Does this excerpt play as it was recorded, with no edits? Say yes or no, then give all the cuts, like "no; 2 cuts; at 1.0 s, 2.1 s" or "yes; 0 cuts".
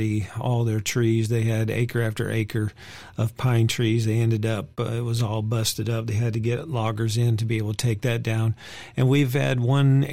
yes; 0 cuts